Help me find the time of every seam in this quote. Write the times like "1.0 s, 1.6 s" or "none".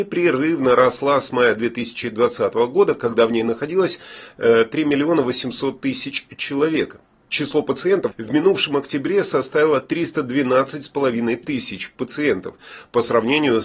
8.1 s